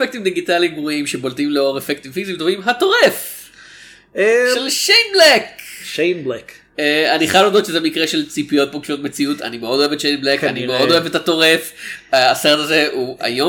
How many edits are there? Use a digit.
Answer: 0